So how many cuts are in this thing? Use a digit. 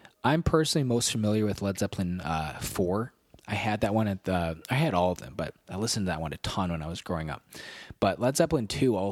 0